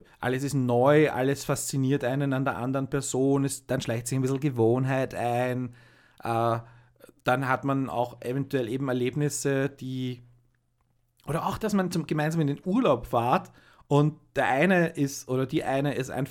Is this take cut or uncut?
uncut